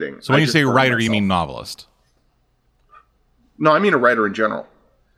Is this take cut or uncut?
uncut